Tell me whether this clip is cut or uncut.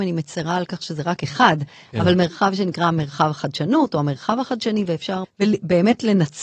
cut